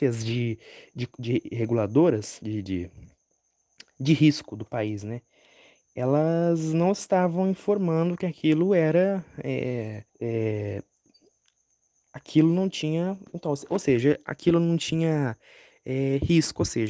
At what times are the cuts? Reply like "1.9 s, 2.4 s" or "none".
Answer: 10.1 s